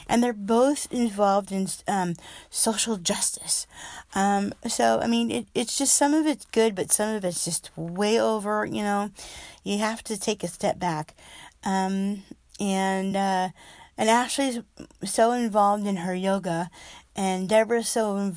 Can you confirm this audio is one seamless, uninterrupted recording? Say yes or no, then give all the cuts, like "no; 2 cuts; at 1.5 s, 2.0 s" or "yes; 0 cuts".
yes; 0 cuts